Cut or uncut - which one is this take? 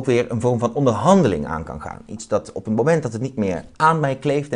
uncut